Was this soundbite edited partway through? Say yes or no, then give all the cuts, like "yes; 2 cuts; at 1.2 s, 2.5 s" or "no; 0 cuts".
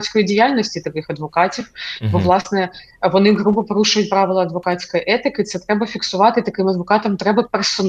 no; 0 cuts